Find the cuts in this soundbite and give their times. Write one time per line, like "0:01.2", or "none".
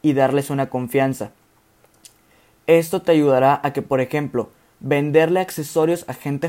none